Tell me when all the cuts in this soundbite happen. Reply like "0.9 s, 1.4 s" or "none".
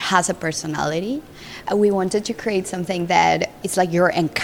1.7 s